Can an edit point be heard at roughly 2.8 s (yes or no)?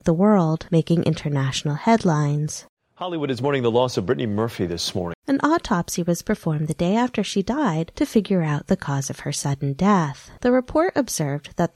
no